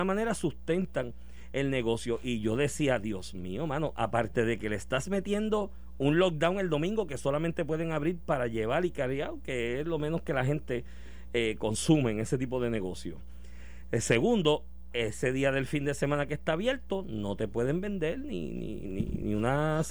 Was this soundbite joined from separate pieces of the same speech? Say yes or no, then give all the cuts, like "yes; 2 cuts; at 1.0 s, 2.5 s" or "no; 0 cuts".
no; 0 cuts